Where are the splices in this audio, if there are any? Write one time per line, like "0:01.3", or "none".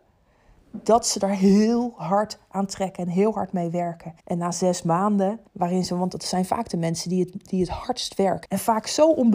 0:04.2
0:05.5
0:08.4